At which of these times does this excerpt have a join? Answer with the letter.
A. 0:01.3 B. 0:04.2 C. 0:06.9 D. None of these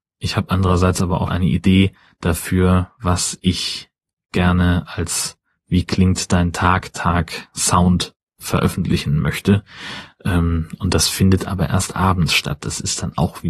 A